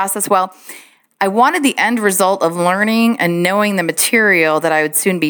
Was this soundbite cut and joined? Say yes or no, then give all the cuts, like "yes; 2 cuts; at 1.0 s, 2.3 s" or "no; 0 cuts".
no; 0 cuts